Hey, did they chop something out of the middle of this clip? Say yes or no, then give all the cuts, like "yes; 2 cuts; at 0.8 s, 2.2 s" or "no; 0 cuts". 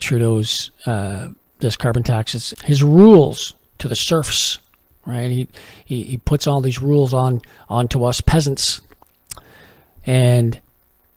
yes; 1 cut; at 2.5 s